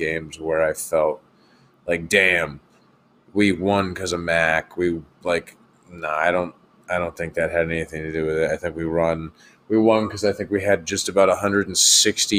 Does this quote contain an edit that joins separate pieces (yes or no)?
no